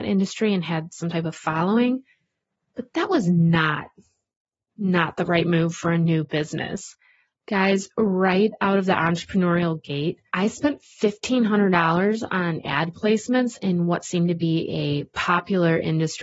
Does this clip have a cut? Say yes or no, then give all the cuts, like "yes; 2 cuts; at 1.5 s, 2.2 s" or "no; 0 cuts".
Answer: yes; 2 cuts; at 7.3 s, 10.3 s